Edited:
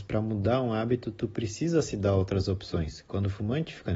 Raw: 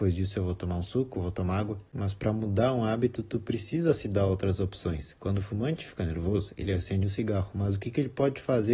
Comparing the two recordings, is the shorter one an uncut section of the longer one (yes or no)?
yes